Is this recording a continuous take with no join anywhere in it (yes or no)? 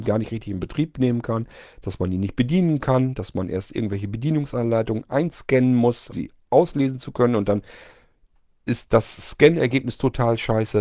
no